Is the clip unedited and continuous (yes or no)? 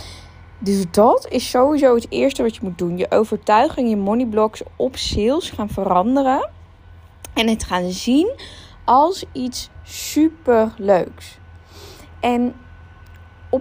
yes